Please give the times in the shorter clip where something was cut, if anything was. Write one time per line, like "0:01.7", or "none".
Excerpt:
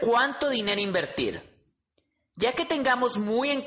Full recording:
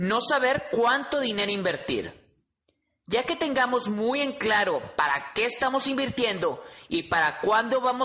none